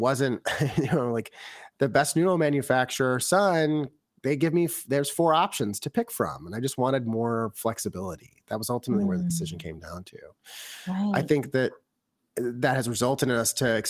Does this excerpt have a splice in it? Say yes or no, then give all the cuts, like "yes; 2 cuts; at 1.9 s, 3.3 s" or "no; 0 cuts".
no; 0 cuts